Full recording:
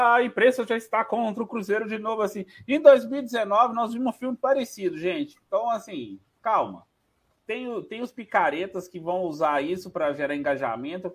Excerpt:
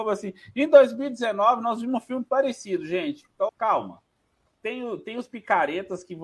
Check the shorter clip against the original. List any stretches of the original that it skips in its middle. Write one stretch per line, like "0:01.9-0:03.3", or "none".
0:05.6-0:06.3